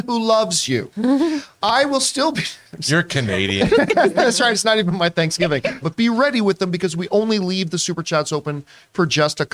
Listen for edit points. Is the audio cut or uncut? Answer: cut